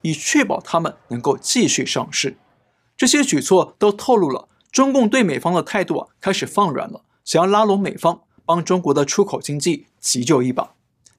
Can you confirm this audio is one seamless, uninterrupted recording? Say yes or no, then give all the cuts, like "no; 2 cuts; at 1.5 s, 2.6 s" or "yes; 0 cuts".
no; 1 cut; at 8.4 s